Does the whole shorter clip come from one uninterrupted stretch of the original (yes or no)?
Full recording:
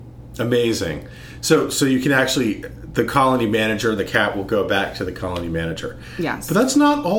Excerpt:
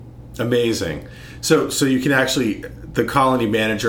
yes